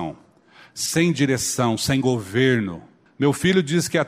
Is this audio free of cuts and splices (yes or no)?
no